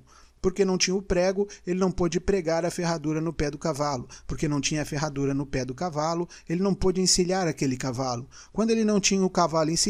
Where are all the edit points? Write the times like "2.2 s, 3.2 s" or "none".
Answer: none